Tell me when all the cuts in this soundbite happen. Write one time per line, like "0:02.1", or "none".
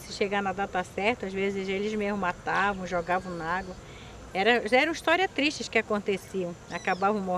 0:04.3

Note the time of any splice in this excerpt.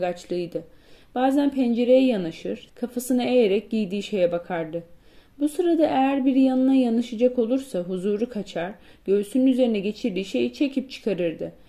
0:02.7

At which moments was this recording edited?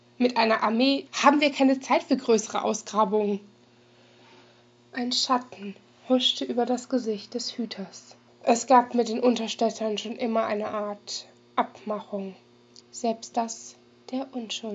0:01.1
0:08.3
0:12.8

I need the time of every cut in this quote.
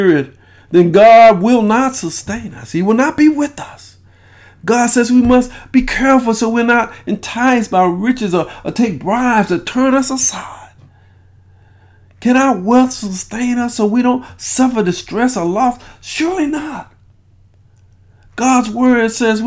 none

